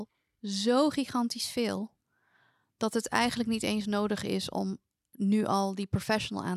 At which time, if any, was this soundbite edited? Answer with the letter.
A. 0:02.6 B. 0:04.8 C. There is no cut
C